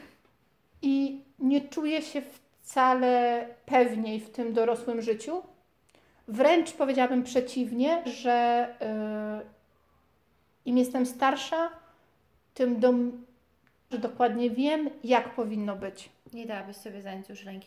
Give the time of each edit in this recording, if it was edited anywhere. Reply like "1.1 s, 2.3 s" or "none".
8.0 s, 13.9 s

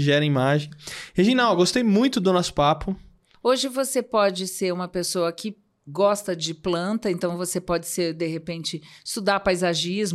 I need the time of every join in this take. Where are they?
3.3 s

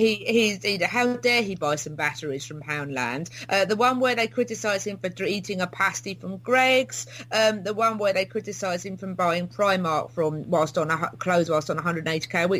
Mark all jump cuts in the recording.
none

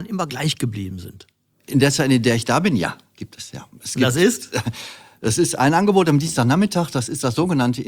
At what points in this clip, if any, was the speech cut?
none

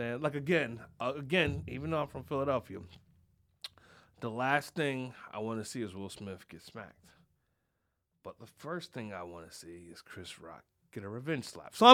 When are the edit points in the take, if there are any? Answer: none

